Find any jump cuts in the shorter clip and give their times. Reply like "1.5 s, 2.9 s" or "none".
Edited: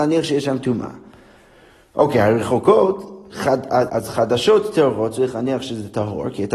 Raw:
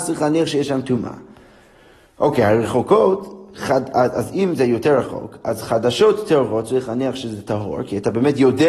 3.9 s